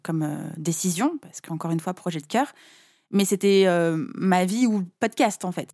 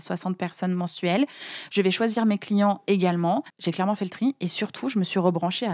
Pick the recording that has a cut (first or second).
second